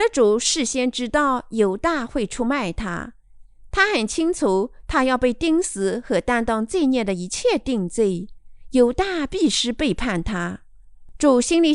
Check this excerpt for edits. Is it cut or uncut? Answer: uncut